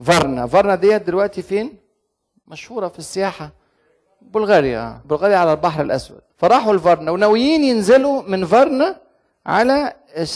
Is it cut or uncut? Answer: cut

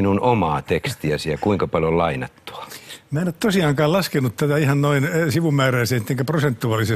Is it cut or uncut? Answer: uncut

